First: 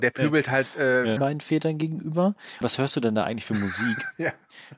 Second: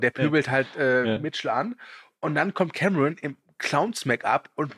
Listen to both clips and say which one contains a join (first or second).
first